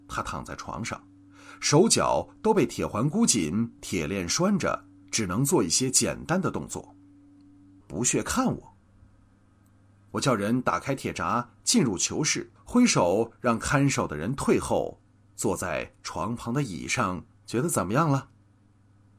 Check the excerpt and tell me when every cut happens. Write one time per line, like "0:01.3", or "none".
0:07.8
0:12.6
0:17.3